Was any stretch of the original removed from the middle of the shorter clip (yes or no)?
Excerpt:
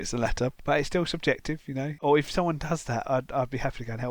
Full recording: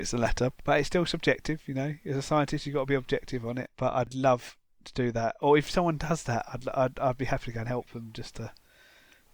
yes